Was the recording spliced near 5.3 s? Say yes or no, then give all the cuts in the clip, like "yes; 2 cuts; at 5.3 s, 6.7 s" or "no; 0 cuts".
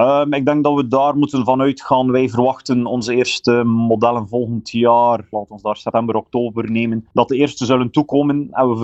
yes; 2 cuts; at 5.3 s, 7.1 s